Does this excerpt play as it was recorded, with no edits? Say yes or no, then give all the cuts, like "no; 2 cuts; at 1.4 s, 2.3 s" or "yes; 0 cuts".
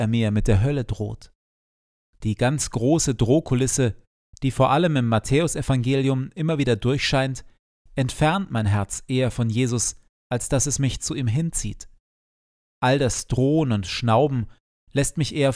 yes; 0 cuts